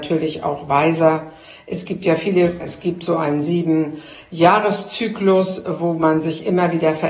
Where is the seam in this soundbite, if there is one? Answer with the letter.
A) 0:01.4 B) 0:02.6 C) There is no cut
B